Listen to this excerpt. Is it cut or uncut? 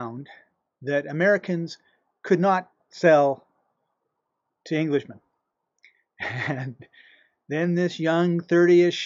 uncut